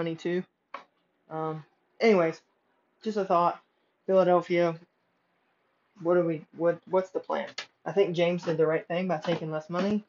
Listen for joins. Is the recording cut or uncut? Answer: cut